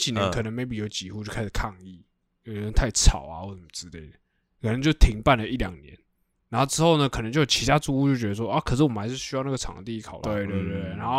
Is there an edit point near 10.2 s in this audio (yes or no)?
yes